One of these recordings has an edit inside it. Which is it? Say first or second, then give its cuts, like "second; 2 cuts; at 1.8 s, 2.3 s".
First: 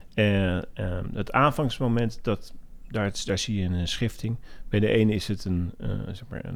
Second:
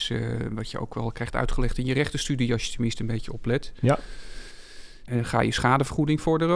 second; 1 cut; at 5.1 s